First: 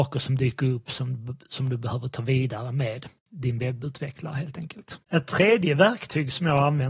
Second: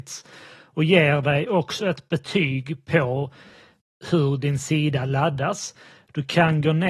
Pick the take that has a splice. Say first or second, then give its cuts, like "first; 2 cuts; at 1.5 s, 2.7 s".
first; 1 cut; at 5.0 s